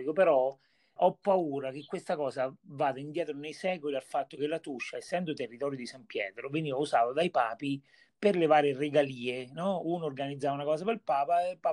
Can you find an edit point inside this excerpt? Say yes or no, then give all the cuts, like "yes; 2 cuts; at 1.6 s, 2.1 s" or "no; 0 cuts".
yes; 1 cut; at 1.0 s